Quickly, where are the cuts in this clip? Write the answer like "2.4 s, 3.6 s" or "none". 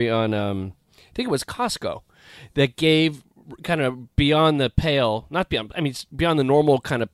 none